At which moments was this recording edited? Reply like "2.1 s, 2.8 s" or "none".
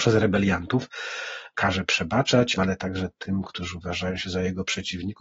1.5 s, 2.6 s